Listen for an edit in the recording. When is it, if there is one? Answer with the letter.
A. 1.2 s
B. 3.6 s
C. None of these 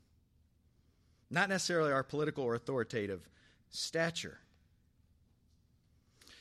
C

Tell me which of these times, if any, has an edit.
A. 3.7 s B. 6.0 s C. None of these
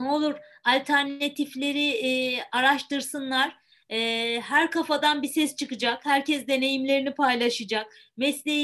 C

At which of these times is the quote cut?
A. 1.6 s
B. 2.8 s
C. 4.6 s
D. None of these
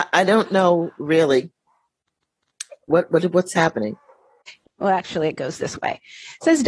C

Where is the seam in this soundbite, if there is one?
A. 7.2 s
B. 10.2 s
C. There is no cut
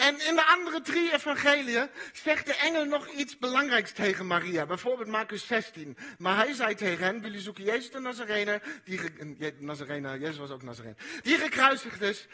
A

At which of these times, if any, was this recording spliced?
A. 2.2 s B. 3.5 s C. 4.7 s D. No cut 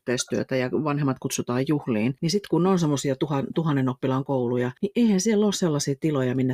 D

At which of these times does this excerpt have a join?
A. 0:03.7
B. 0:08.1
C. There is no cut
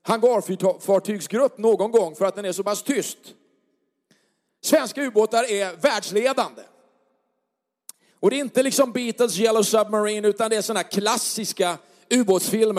B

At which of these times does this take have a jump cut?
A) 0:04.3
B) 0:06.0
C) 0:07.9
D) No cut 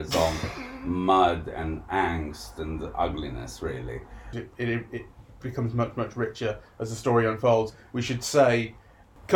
A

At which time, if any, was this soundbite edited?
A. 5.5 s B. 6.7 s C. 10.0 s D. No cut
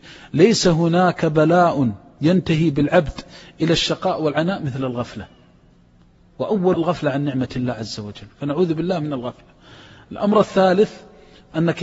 B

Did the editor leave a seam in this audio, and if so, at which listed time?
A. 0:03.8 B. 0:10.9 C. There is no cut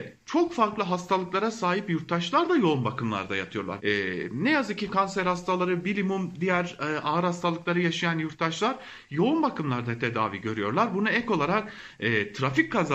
A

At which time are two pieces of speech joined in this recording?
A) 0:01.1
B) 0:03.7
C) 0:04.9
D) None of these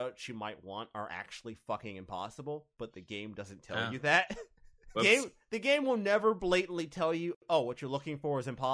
C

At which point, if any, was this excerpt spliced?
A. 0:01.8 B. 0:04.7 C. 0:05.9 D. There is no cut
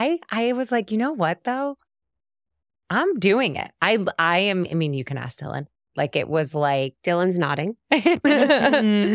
C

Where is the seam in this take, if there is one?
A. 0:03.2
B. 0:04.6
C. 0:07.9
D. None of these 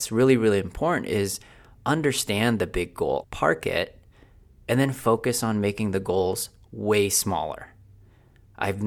A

